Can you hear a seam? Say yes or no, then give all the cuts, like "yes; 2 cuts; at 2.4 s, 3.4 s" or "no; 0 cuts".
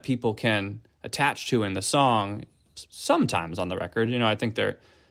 no; 0 cuts